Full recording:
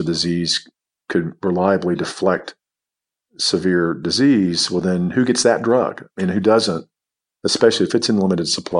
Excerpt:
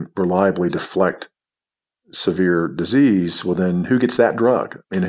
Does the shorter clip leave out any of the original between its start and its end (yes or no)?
no